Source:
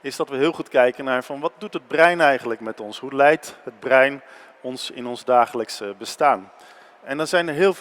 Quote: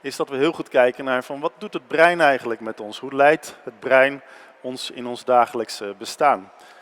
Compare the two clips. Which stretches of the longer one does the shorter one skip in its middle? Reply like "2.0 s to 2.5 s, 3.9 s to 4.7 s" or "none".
none